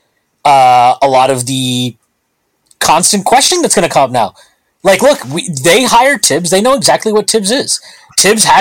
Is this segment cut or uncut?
uncut